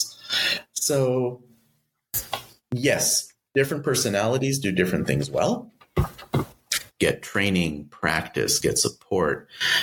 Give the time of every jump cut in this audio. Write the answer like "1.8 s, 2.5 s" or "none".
6.9 s, 8.6 s